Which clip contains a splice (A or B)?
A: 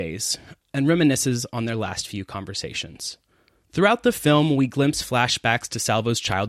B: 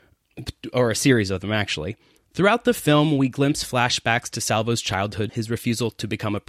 B